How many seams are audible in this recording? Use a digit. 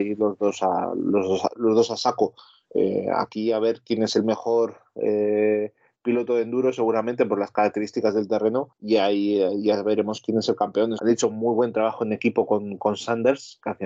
1